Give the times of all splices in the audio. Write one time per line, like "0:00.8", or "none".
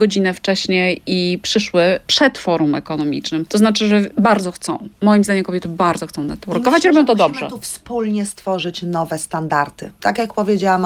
none